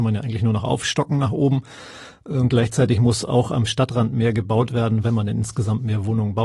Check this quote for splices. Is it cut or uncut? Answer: uncut